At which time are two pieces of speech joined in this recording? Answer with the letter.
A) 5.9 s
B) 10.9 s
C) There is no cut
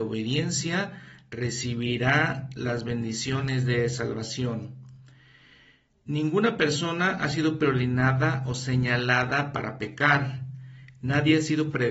C